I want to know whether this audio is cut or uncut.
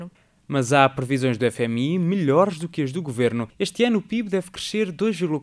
uncut